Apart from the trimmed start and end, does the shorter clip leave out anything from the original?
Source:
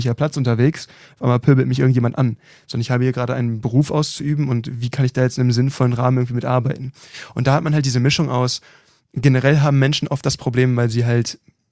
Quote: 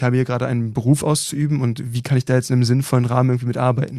no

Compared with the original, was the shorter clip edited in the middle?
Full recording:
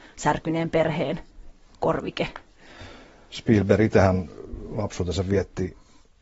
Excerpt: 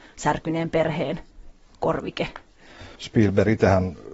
yes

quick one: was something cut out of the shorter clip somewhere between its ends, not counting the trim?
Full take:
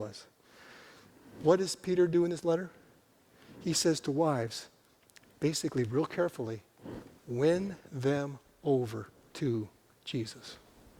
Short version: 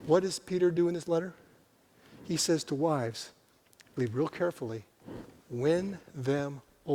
yes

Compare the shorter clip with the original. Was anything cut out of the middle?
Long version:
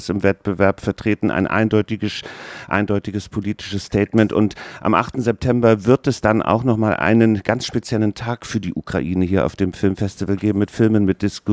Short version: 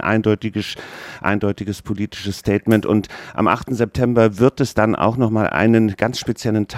no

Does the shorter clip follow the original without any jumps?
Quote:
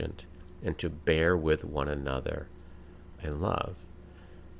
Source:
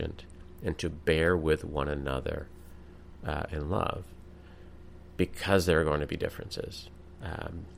no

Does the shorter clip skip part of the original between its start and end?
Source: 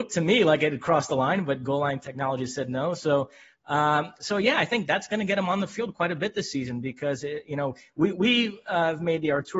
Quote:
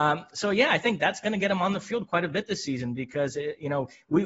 no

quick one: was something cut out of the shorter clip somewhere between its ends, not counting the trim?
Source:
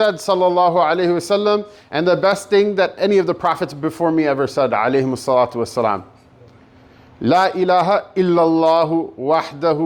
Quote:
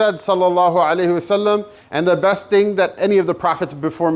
no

